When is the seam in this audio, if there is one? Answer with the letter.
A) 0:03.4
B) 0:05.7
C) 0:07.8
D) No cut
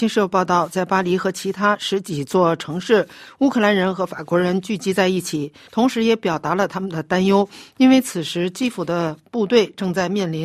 B